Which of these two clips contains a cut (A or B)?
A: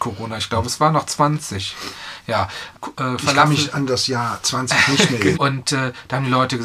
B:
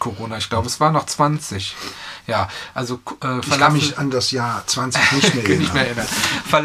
A